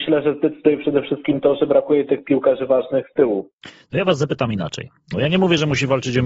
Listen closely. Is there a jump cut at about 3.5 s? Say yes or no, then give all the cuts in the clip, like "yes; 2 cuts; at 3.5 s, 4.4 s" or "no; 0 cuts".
no; 1 cut; at 5.1 s